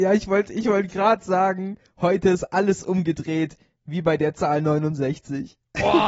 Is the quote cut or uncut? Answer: uncut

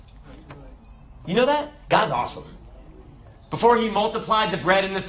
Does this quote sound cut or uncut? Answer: uncut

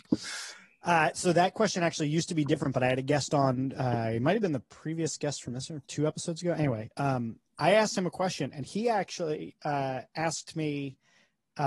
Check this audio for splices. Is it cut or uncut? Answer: cut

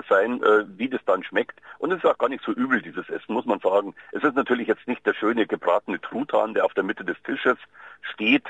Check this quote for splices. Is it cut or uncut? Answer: uncut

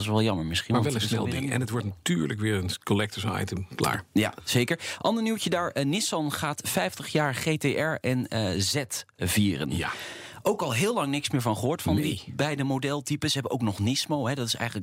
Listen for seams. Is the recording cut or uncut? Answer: uncut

